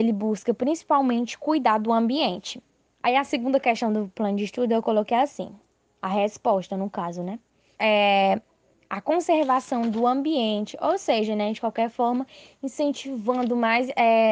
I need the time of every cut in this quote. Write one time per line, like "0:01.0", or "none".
0:07.7